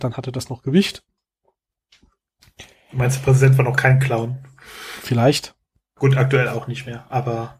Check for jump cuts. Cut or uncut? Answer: uncut